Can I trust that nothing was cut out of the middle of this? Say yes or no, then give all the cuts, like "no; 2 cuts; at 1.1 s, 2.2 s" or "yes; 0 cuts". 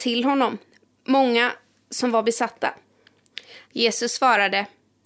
no; 1 cut; at 3.7 s